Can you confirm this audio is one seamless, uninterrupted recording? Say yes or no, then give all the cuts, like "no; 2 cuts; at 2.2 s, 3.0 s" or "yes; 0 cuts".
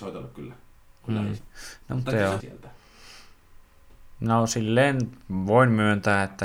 no; 2 cuts; at 1.4 s, 2.4 s